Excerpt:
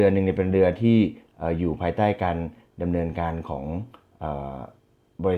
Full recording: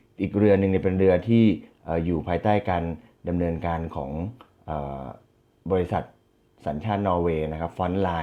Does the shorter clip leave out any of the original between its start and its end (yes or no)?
no